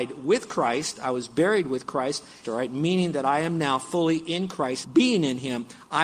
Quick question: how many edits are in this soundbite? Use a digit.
2